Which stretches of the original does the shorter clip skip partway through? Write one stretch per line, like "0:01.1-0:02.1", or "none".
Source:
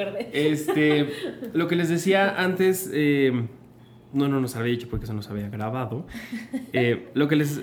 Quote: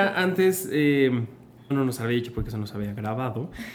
0:03.9-0:04.3